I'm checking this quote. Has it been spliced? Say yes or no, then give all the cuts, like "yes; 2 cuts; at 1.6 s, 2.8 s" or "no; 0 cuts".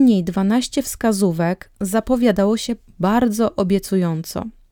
yes; 1 cut; at 2.8 s